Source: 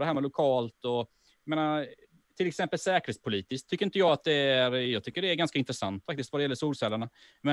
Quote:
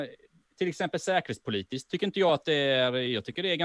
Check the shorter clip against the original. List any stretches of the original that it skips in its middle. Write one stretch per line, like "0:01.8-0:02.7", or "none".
none